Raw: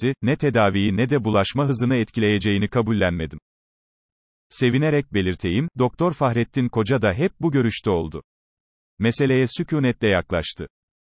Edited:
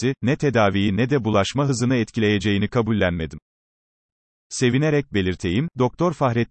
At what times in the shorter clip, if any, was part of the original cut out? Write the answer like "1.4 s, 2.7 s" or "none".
none